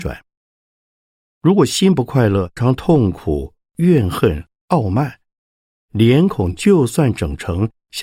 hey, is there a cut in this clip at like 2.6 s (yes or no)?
yes